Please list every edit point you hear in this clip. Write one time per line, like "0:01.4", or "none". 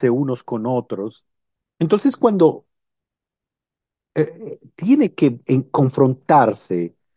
0:01.7